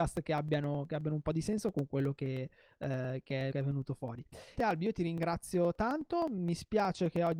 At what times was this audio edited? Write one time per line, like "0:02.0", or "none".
0:03.5
0:04.6